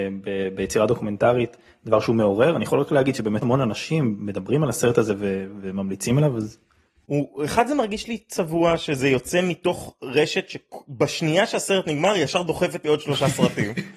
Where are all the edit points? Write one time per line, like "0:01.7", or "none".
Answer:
0:03.4